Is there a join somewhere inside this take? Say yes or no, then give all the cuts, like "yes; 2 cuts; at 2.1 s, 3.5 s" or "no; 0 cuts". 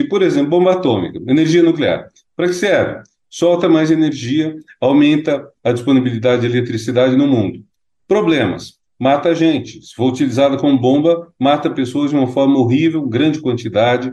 no; 0 cuts